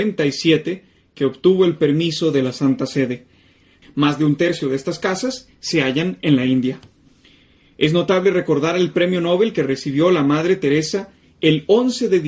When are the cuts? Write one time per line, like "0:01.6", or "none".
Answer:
0:03.8